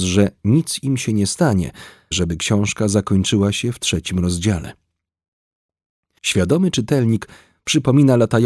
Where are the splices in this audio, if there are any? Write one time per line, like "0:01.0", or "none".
0:02.1
0:06.2